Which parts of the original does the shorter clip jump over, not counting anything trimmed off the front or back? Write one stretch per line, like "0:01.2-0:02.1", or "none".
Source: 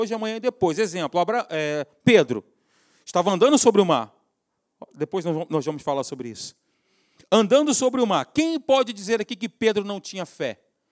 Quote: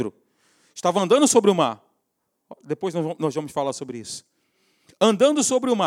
none